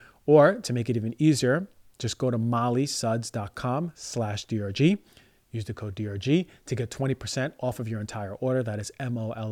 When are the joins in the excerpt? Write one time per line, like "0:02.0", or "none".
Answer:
none